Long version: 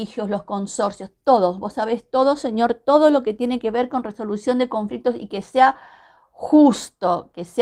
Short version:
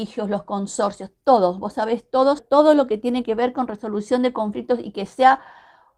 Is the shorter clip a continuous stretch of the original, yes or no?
no